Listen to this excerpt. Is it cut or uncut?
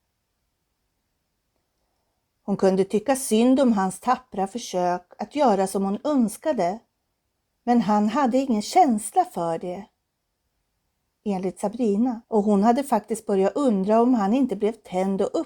cut